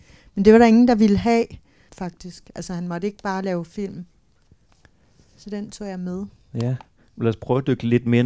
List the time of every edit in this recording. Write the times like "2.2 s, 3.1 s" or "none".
1.9 s